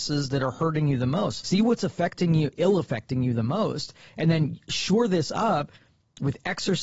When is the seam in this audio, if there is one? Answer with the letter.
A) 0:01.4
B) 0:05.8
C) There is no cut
A